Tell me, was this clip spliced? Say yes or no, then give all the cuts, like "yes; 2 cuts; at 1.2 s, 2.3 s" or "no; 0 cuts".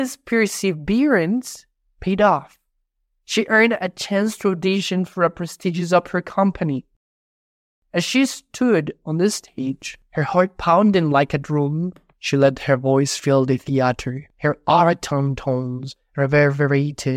no; 0 cuts